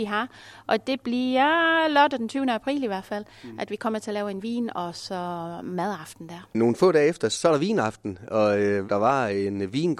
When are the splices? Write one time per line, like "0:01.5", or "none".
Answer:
0:06.5
0:08.9